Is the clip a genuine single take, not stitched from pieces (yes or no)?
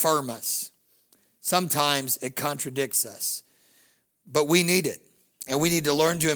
yes